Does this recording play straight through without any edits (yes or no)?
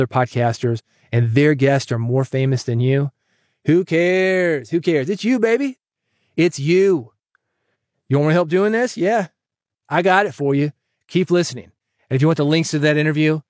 yes